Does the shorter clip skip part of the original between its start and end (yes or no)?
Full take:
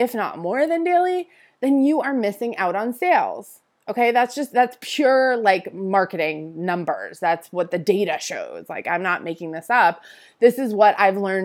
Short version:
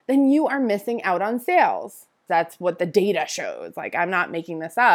yes